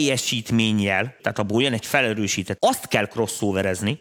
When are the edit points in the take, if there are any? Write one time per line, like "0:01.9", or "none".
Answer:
0:01.2
0:02.6